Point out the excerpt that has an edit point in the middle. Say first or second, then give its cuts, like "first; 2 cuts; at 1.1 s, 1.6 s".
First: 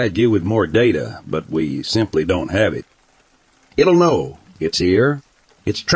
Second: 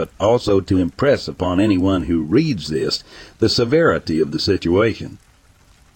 first; 1 cut; at 3.7 s